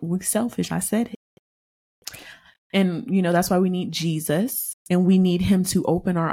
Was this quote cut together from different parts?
no; 0 cuts

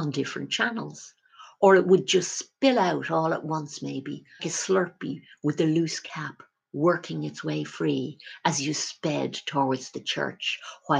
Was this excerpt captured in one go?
no; 1 cut; at 4.4 s

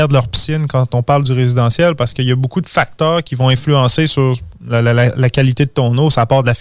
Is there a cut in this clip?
no; 0 cuts

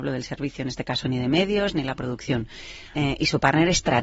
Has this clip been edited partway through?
yes; 1 cut; at 2.9 s

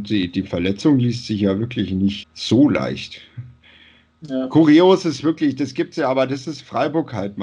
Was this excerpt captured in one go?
no; 1 cut; at 2.2 s

